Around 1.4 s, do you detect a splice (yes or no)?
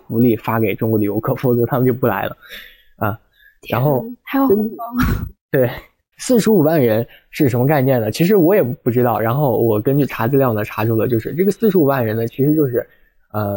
no